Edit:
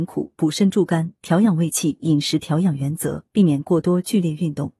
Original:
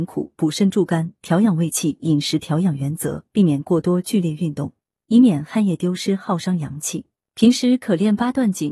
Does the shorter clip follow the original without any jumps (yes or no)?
yes